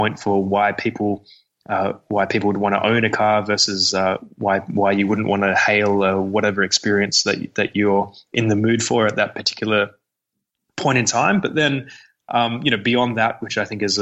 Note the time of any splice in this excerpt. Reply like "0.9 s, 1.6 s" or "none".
none